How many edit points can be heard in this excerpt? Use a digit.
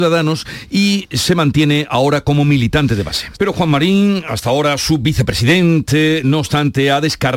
1